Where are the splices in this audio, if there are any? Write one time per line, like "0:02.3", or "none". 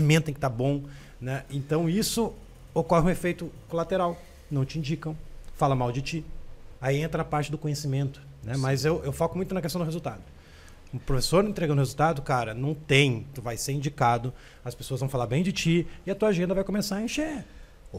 0:06.8